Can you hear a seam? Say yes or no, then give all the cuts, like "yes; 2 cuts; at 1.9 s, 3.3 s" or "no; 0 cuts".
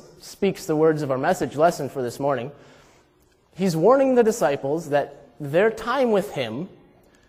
no; 0 cuts